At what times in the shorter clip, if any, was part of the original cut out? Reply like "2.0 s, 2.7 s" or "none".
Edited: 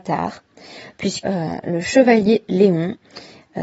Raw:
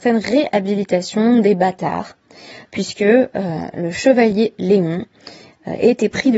1.2 s